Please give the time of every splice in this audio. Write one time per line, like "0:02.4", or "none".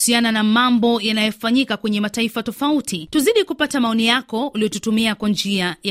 none